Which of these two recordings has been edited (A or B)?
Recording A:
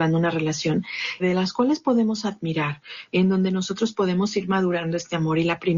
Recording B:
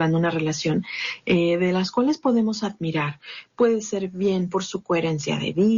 A